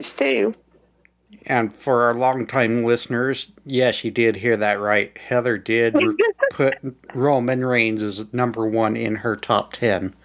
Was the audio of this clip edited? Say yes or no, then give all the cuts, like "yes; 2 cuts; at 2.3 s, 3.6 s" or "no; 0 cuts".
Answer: no; 0 cuts